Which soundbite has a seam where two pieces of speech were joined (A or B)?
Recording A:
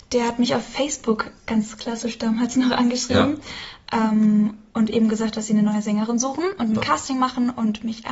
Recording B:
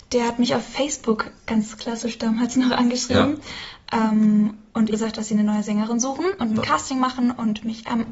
B